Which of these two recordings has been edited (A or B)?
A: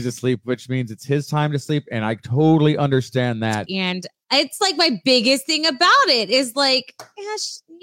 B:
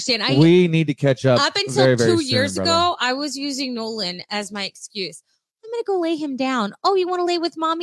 A